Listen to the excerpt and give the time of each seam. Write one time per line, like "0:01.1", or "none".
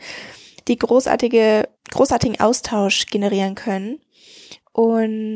0:01.8